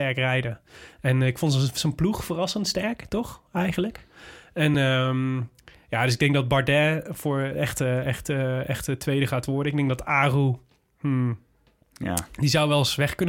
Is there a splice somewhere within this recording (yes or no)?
no